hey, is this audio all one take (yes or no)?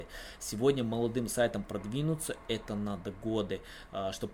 yes